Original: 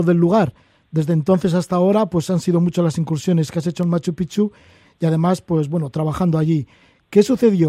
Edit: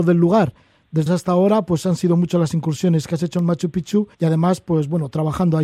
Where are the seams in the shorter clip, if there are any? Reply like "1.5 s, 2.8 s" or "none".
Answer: 1.1 s, 4.1 s